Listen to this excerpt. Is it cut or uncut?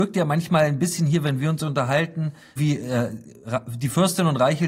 cut